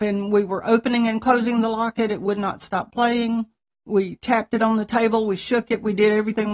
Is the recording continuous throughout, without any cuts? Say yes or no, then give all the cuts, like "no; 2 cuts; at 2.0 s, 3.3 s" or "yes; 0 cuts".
yes; 0 cuts